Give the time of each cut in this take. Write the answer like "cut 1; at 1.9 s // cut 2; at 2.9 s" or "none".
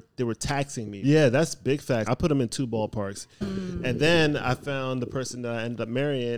cut 1; at 1.0 s // cut 2; at 2.1 s // cut 3; at 3.4 s